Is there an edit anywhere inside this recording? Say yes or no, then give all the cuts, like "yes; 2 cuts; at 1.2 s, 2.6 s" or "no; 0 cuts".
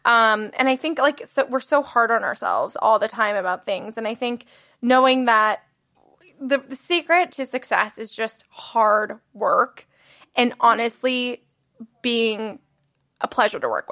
no; 0 cuts